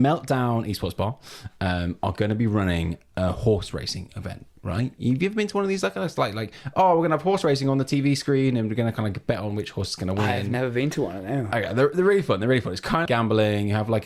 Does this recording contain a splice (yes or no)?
yes